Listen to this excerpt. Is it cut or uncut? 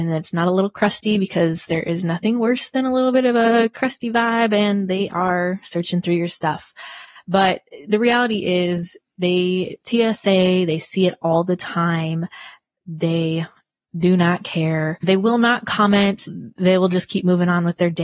uncut